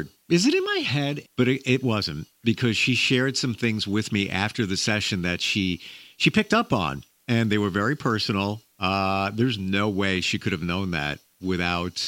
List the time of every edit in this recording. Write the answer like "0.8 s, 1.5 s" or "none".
1.2 s